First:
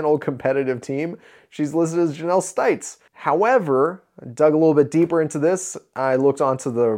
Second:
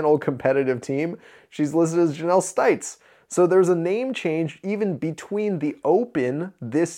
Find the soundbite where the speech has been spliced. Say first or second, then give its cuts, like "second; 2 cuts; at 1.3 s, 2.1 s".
first; 1 cut; at 3.1 s